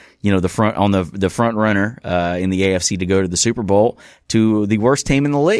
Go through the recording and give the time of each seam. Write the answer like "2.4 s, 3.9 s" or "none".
none